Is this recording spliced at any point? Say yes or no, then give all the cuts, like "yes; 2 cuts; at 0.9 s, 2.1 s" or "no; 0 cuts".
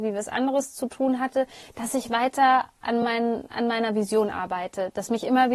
no; 0 cuts